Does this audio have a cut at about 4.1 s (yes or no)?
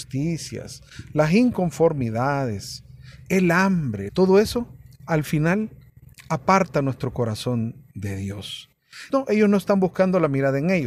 yes